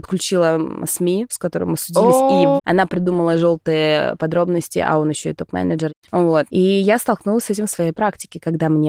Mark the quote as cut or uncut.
cut